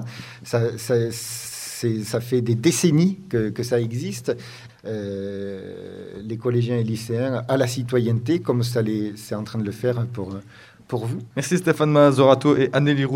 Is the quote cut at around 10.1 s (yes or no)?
no